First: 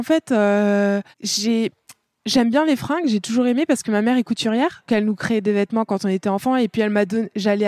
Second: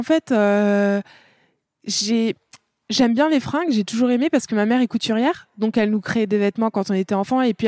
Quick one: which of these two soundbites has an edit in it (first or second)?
first